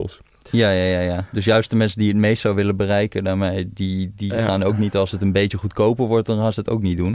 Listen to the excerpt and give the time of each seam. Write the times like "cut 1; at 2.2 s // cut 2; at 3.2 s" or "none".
none